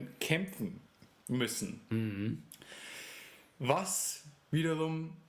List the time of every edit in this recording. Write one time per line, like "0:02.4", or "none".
none